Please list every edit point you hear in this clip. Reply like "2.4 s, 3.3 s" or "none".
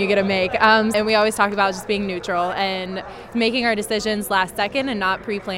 0.9 s, 3.3 s